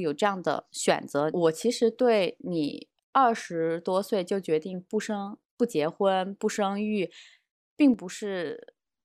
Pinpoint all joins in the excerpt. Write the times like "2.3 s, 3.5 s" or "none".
1.3 s